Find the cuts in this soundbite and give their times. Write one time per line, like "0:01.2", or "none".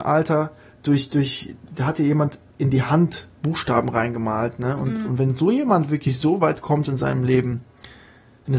0:05.1